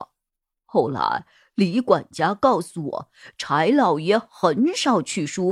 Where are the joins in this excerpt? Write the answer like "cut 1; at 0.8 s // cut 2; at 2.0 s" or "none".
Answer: none